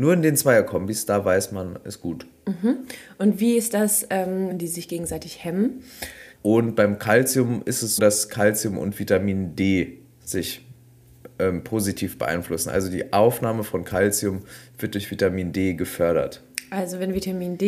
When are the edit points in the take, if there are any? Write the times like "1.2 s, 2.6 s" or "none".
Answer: 4.5 s, 6.3 s, 8.0 s